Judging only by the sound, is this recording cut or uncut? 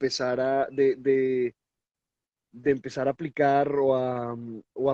uncut